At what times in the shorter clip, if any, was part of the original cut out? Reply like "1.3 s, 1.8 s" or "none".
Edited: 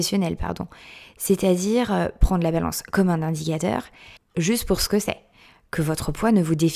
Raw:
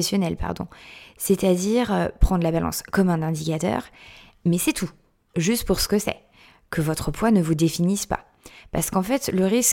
4.2 s